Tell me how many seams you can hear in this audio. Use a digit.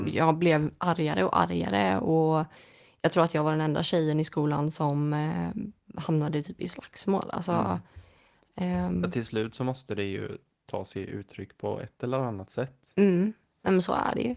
0